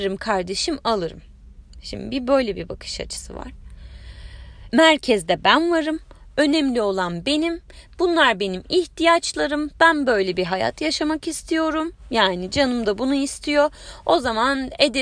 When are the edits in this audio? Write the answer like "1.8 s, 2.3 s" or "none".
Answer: 4.7 s